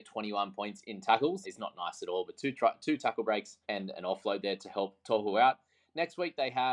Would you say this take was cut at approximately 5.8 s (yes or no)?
no